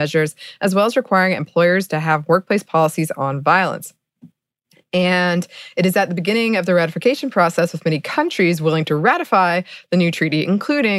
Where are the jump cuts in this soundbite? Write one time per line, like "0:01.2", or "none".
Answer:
none

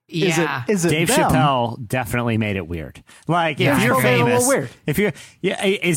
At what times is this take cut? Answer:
none

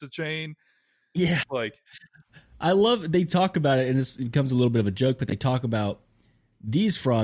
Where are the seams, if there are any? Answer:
0:01.4

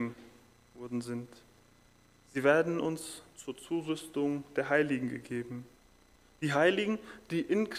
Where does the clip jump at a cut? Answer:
none

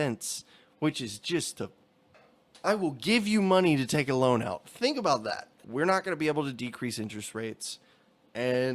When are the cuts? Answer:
0:05.6

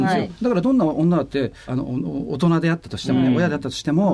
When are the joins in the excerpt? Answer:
0:01.7

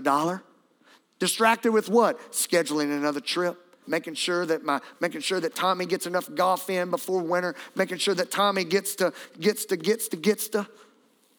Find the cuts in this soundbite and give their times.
0:03.8
0:05.0
0:10.1

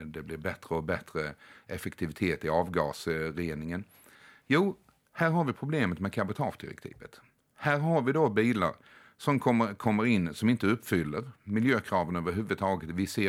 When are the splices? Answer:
none

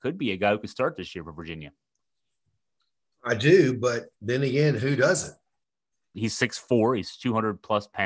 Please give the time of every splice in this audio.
0:04.1
0:06.1

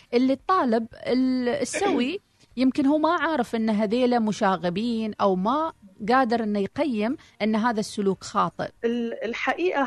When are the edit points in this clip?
0:08.8

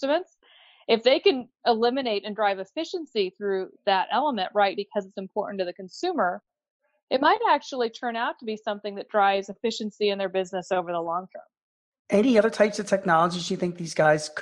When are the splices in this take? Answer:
0:04.7

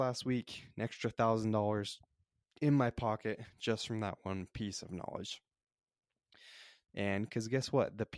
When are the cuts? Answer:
0:06.9

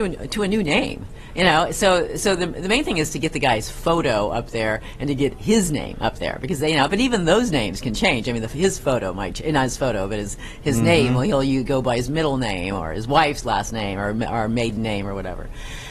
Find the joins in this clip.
none

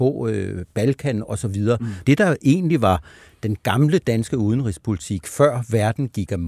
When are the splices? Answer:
0:02.0

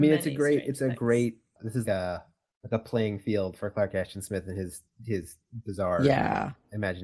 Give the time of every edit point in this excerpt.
0:01.8

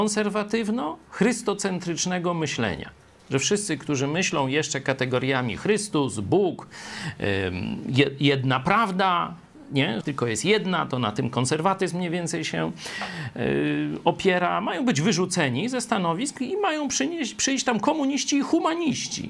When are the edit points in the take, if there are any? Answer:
0:10.0

